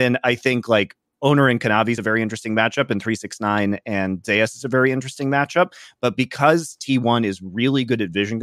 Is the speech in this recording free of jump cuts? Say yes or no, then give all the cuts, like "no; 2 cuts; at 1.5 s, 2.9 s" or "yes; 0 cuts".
yes; 0 cuts